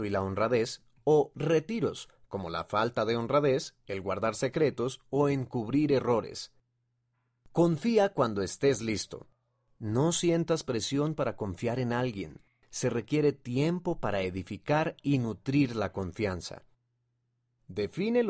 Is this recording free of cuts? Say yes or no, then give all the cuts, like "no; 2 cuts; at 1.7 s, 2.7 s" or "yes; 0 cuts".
yes; 0 cuts